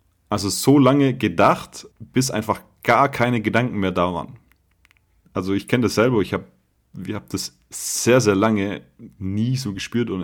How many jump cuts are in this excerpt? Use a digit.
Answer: 2